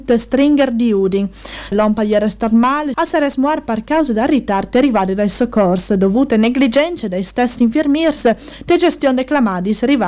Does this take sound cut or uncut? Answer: cut